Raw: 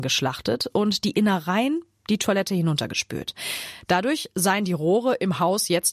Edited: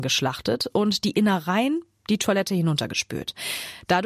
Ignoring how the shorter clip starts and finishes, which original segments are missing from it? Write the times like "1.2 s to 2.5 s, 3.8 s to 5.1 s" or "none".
none